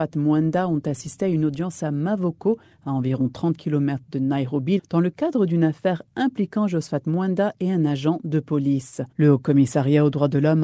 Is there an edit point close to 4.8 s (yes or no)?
yes